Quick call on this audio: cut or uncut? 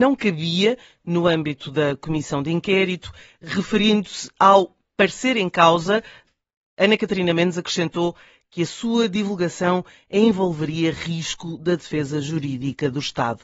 uncut